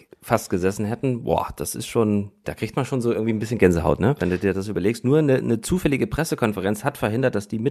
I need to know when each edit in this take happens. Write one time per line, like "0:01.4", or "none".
0:02.4